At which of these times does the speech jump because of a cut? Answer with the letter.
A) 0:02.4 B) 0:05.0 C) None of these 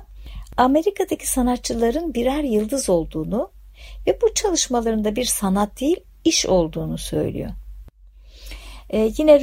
C